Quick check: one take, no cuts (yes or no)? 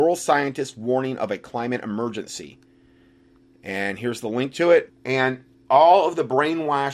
no